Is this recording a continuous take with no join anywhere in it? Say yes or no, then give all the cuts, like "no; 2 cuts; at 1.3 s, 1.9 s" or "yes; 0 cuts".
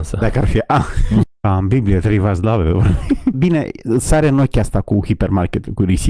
no; 2 cuts; at 1.2 s, 3.3 s